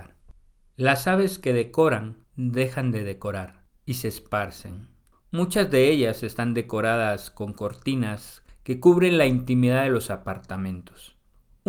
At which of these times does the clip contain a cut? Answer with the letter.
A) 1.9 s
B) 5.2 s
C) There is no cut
B